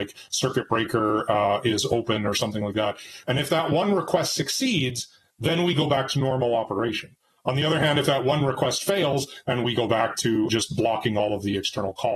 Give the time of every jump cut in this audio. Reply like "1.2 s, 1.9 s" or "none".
3.2 s, 9.4 s, 10.5 s